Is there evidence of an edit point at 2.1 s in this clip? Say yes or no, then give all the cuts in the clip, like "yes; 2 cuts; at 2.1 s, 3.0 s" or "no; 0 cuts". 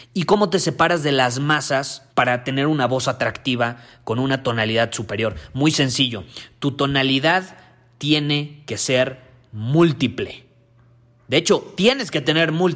yes; 1 cut; at 2.1 s